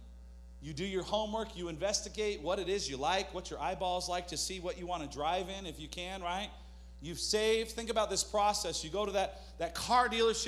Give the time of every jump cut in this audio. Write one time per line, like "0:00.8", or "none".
none